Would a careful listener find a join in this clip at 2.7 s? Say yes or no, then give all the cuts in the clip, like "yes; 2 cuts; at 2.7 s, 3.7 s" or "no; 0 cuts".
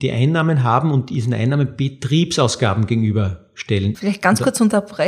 no; 1 cut; at 3.9 s